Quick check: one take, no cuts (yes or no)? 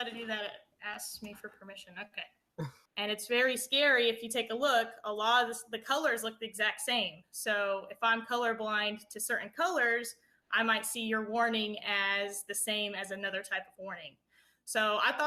no